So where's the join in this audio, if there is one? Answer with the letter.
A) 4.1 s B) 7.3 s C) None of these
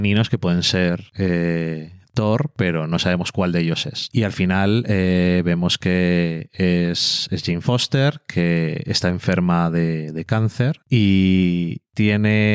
A